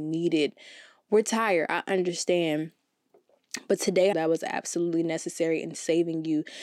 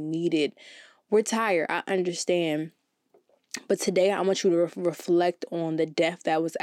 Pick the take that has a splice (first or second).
first